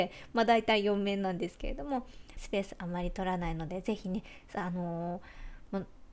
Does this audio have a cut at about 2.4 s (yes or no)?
yes